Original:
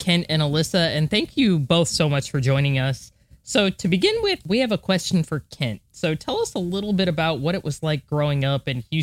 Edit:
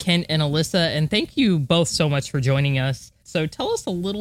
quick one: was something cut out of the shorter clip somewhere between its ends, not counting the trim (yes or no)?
yes